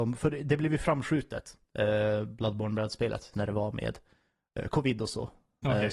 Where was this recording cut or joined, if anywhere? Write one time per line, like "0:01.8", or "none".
0:03.3